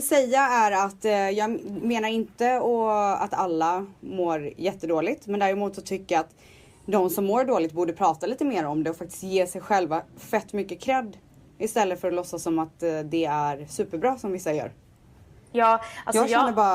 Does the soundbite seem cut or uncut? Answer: uncut